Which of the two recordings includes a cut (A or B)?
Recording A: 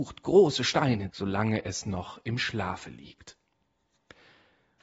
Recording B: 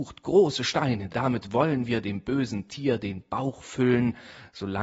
A